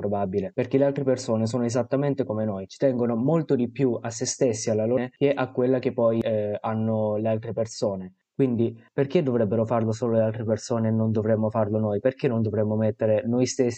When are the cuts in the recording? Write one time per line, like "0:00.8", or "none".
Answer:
0:05.0